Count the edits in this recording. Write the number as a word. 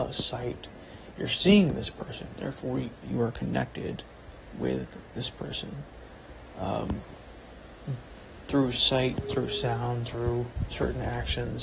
one